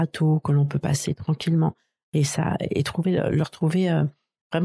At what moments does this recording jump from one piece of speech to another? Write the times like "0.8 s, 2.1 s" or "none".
none